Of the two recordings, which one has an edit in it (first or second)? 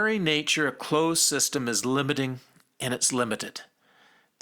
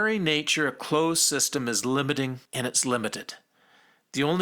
second